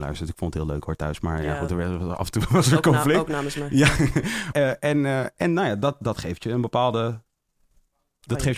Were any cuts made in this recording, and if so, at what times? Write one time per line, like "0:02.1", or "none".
0:04.5